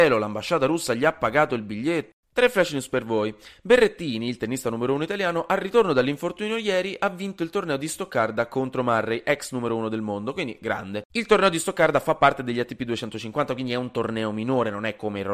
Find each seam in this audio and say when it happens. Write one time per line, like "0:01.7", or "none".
0:02.1